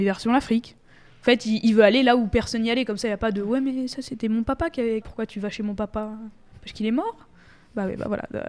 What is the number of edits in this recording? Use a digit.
1